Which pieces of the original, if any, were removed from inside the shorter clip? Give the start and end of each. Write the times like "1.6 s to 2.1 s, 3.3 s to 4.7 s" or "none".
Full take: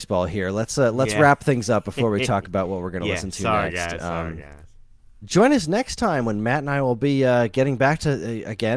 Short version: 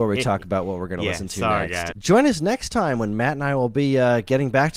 3.9 s to 5.2 s